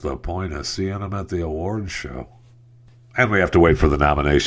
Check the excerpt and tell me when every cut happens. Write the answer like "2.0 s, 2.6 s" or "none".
none